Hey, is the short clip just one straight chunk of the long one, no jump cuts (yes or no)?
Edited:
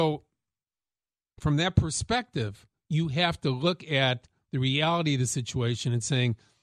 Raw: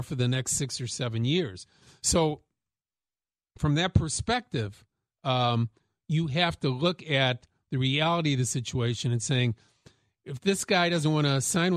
no